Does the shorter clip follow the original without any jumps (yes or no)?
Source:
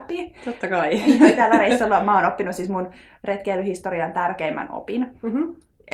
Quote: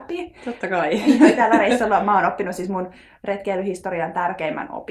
yes